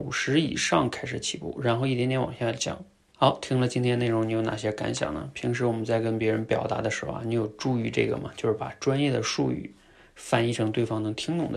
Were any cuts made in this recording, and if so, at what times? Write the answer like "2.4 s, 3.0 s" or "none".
3.1 s